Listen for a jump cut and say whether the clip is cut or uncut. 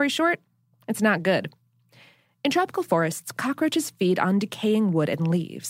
uncut